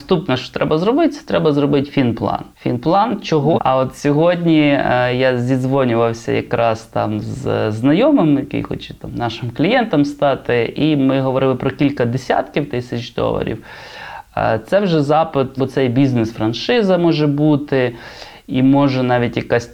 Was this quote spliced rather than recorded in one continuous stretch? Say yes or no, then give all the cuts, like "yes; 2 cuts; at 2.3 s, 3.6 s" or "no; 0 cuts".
yes; 3 cuts; at 2.5 s, 3.5 s, 15.6 s